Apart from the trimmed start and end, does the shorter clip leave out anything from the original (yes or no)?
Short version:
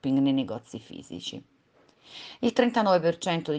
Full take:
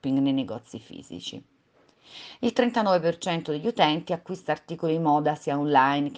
no